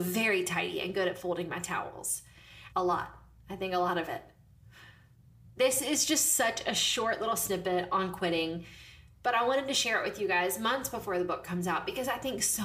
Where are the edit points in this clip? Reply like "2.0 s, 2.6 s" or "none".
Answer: 2.7 s